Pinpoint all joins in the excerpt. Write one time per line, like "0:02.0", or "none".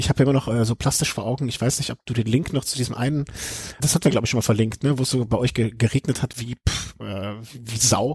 0:03.8

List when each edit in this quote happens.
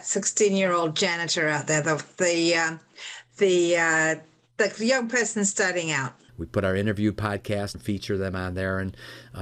0:06.3
0:07.7

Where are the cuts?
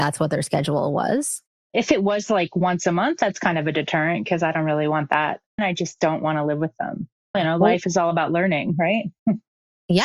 0:05.6
0:07.3

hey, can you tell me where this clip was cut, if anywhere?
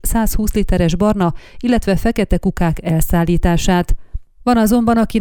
none

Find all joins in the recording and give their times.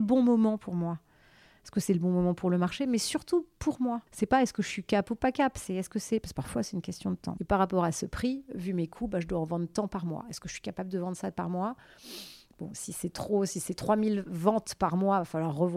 0:04.1
0:07.4

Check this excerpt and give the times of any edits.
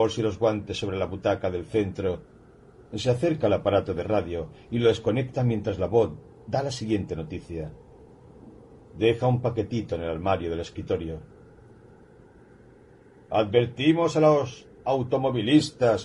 none

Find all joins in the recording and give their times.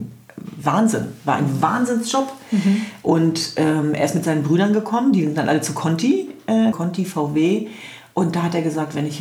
0:06.7

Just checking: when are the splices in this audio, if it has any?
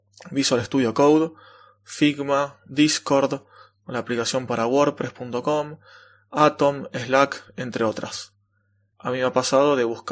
0:08.9

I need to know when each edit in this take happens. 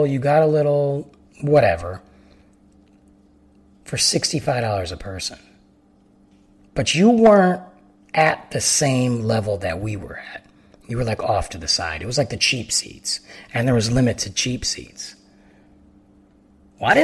none

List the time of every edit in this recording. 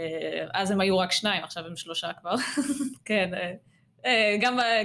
0:03.0

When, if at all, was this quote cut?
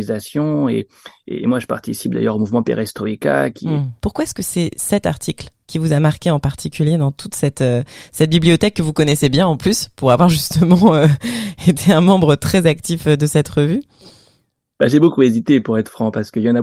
0:04.0

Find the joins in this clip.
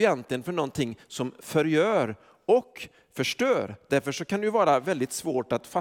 none

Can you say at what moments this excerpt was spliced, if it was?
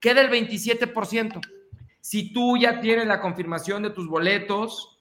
0:01.9

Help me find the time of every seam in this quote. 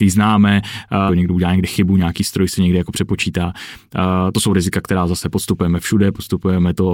0:01.1

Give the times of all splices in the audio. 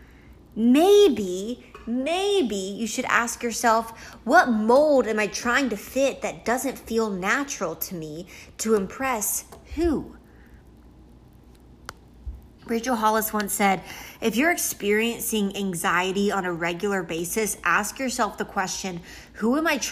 0:12.6

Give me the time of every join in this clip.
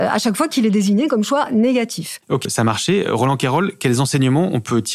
0:02.5

